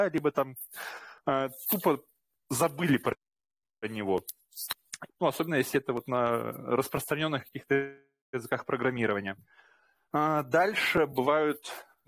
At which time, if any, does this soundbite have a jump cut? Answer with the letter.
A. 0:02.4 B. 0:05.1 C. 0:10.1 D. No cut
B